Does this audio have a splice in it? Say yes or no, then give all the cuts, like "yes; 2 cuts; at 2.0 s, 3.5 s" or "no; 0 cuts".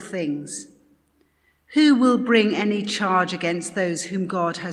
no; 0 cuts